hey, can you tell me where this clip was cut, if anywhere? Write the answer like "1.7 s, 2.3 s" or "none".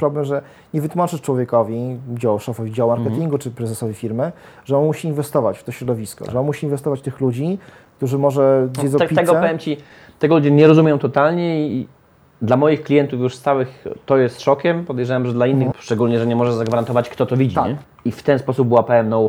15.7 s, 17.8 s